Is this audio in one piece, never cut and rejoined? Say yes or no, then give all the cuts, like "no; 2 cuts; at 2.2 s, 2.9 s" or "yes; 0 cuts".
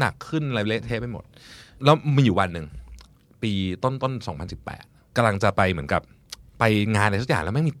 yes; 0 cuts